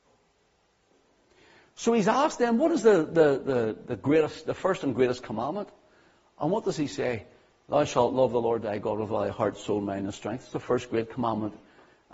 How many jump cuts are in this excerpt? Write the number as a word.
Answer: zero